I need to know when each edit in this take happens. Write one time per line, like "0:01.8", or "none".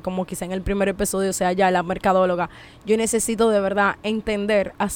none